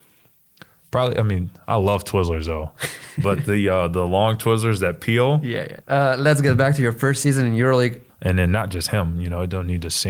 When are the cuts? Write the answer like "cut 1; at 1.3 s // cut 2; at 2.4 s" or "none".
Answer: cut 1; at 5.8 s // cut 2; at 8.1 s